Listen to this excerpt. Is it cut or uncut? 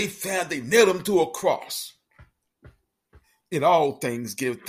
uncut